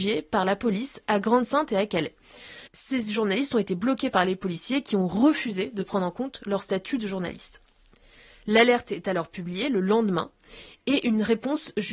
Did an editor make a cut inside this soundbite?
yes; 1 cut; at 2.7 s

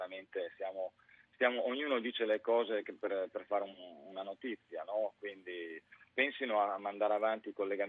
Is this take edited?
no; 0 cuts

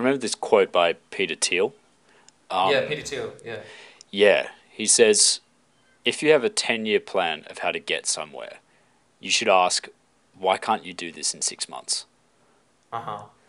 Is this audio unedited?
yes; 0 cuts

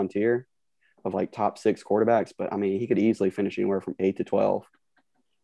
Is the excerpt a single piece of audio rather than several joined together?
yes; 0 cuts

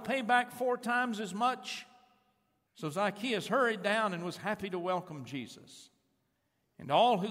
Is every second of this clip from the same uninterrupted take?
no; 1 cut; at 2.7 s

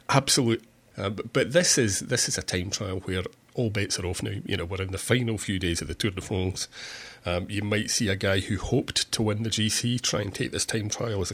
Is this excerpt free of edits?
no; 1 cut; at 0.9 s

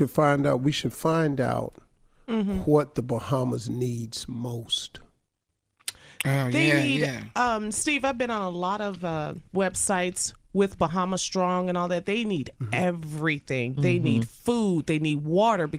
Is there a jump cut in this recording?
no; 0 cuts

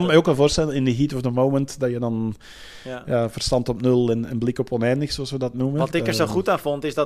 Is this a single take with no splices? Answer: yes; 0 cuts

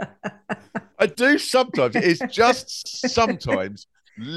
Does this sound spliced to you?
no; 0 cuts

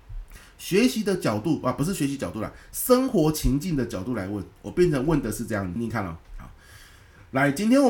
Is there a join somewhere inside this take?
yes; 1 cut; at 5.8 s

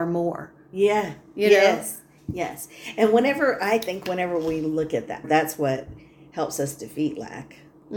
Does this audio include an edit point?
yes; 1 cut; at 5.2 s

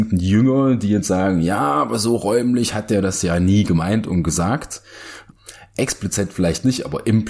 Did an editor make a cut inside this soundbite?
no; 0 cuts

